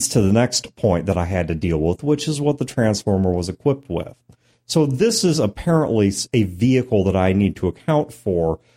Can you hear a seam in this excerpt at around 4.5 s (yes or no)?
yes